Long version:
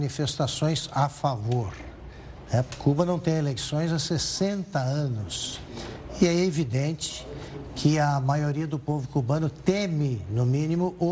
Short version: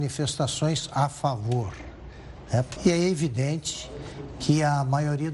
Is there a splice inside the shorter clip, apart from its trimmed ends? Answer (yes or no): yes